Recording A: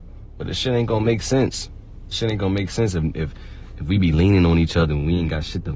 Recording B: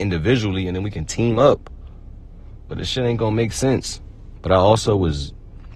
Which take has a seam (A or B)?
B